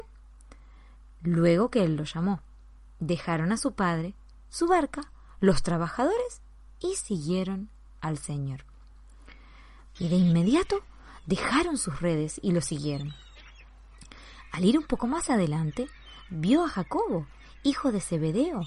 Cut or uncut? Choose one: cut